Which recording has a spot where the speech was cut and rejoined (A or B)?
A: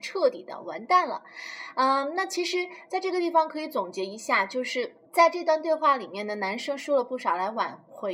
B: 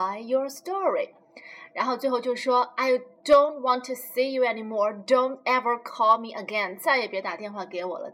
A